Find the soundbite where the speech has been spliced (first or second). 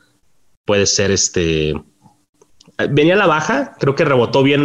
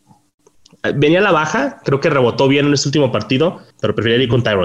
second